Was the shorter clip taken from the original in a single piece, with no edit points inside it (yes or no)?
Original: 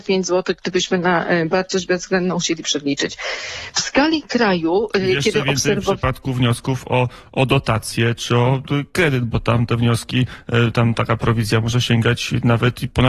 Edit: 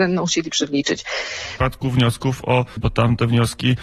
no